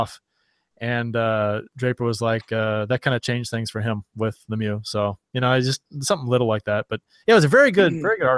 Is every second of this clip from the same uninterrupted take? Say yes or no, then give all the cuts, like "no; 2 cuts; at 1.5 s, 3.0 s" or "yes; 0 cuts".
yes; 0 cuts